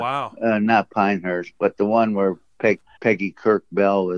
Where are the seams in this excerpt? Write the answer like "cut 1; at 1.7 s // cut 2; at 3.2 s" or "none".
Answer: cut 1; at 3.0 s